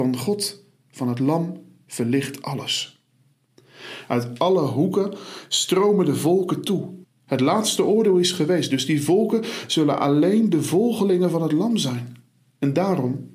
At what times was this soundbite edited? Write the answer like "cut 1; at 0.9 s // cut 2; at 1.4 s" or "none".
cut 1; at 7.0 s